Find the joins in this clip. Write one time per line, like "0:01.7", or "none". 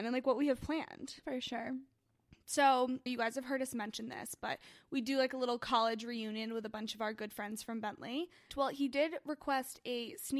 0:03.1
0:08.5